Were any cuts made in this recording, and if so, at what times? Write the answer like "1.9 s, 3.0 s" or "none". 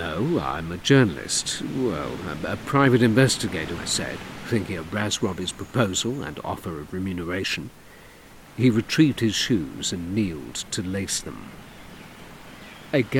3.8 s